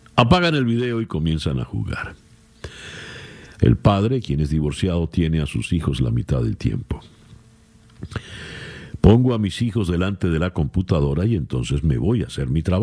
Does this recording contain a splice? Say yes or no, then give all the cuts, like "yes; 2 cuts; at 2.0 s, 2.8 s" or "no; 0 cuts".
yes; 1 cut; at 3.6 s